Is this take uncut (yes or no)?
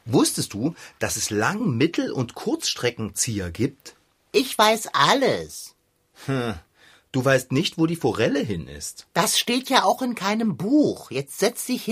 yes